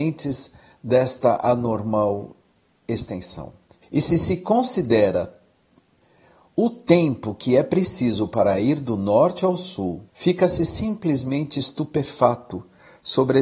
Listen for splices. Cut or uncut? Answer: cut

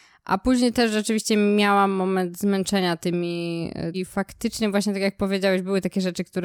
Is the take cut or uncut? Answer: cut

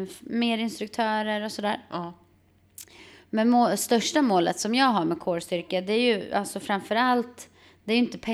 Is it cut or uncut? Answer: uncut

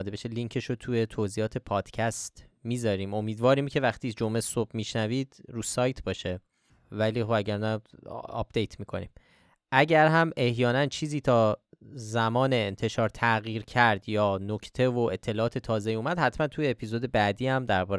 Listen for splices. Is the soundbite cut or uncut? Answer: uncut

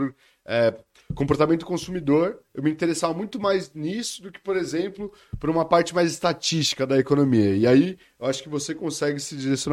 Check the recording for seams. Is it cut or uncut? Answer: uncut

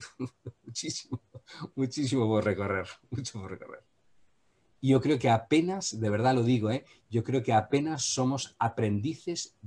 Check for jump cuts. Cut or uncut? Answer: uncut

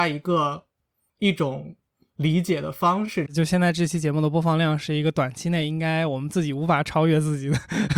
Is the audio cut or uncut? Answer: cut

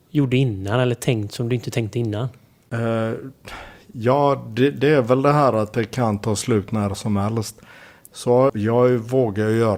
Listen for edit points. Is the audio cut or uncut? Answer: cut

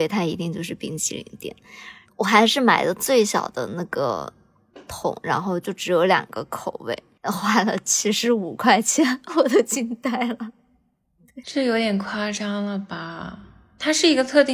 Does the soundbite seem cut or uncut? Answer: uncut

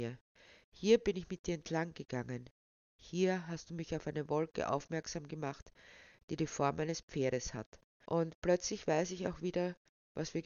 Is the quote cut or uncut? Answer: cut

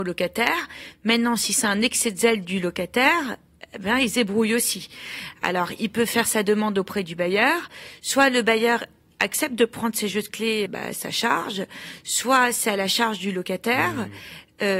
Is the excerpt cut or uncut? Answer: cut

